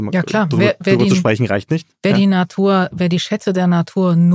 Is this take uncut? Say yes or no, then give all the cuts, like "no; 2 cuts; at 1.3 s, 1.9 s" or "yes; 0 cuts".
no; 1 cut; at 2.9 s